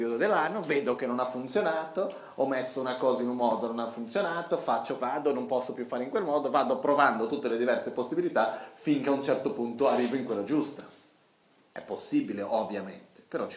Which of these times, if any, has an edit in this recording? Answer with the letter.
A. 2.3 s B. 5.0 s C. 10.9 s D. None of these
B